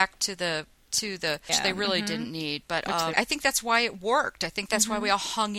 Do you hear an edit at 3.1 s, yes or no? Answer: yes